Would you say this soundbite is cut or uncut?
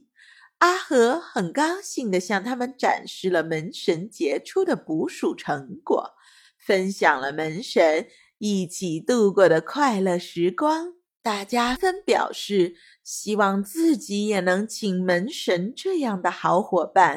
cut